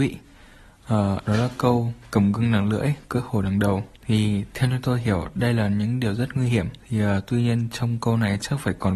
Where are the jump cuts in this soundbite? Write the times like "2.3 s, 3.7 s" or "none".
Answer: 4.0 s, 6.8 s